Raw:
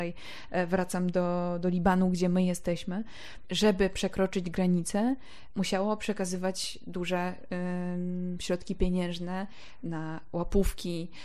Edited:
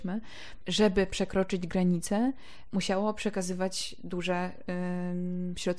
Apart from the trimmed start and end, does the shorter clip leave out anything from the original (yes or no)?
no